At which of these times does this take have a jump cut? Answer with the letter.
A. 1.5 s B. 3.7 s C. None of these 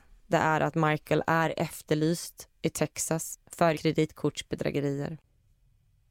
B